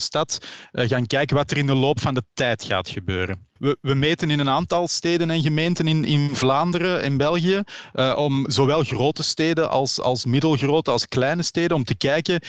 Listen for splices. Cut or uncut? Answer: cut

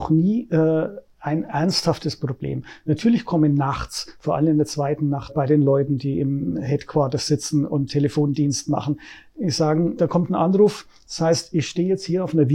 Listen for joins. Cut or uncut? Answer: cut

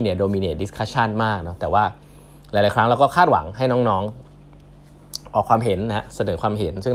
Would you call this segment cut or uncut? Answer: uncut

